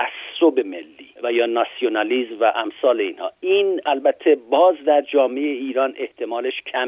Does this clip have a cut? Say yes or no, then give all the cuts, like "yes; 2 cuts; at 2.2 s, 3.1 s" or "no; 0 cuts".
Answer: yes; 1 cut; at 1.2 s